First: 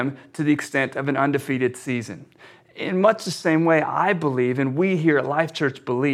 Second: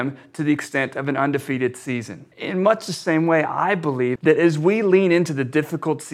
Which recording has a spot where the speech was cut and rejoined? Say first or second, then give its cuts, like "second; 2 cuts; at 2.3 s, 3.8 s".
second; 2 cuts; at 2.3 s, 4.2 s